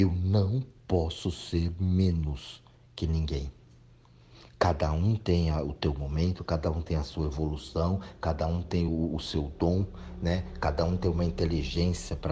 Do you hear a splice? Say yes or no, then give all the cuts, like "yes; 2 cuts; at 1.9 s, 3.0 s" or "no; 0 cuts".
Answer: no; 0 cuts